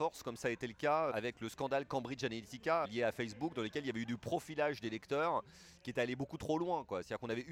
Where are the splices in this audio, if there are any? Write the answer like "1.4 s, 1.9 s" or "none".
1.1 s, 2.8 s